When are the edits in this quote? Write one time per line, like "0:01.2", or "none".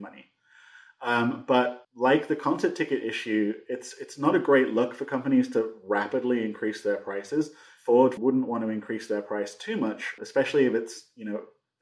0:01.8
0:08.2
0:10.2